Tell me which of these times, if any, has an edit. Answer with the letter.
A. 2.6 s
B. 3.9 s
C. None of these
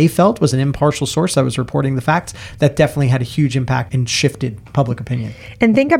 B